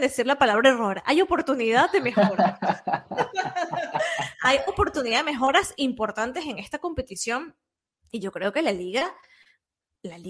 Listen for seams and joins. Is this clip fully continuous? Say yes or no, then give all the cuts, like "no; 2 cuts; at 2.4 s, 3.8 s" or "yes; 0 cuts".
yes; 0 cuts